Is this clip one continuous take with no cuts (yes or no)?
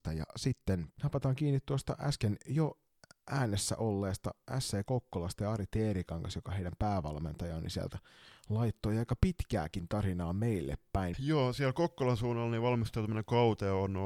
no